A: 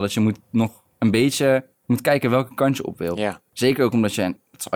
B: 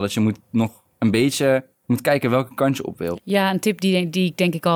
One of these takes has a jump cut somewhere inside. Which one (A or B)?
B